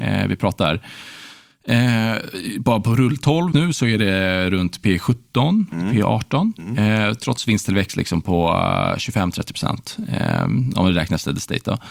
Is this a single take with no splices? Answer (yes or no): no